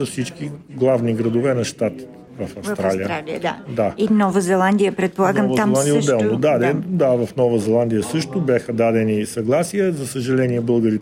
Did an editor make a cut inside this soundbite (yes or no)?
no